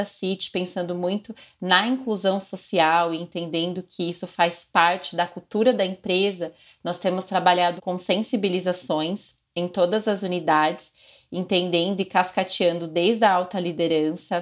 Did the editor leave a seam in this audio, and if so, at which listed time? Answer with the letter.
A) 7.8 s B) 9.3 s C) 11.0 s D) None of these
A